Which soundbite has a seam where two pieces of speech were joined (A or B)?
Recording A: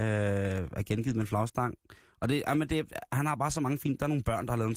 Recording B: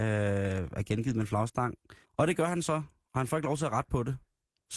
B